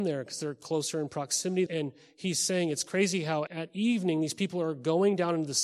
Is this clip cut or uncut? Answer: cut